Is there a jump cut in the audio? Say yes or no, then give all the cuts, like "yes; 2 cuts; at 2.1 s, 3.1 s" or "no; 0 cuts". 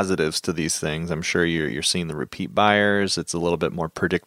no; 0 cuts